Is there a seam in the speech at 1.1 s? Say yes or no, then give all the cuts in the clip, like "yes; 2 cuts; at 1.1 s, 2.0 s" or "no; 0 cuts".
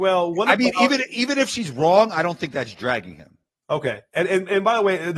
no; 0 cuts